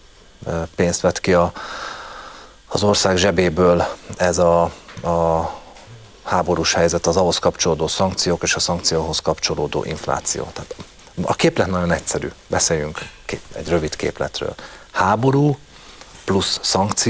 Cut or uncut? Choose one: uncut